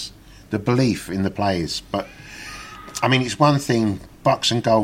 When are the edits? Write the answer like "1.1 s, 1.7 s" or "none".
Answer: none